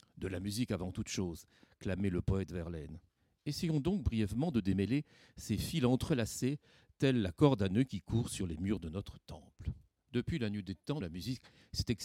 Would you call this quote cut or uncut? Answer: cut